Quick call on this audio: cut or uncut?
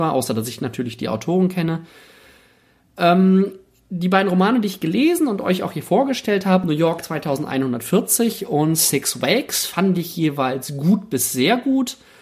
uncut